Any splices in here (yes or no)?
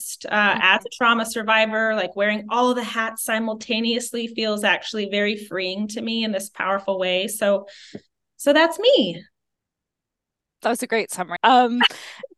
yes